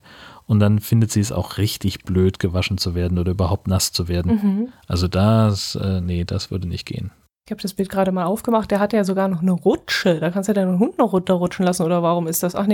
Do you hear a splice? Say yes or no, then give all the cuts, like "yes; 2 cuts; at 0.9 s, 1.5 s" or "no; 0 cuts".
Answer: no; 0 cuts